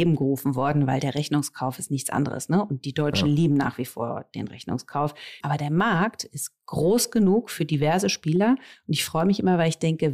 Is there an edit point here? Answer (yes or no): yes